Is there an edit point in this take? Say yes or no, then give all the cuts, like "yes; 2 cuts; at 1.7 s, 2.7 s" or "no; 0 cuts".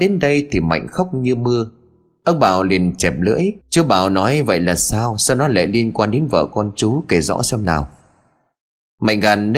yes; 1 cut; at 3.6 s